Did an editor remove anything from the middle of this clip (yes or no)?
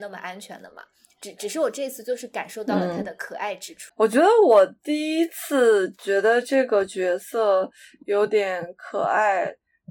yes